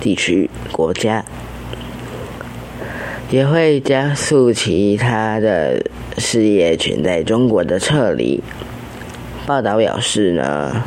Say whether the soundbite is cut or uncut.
cut